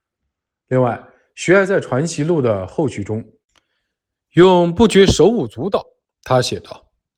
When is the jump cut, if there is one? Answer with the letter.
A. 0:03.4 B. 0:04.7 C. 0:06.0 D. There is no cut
C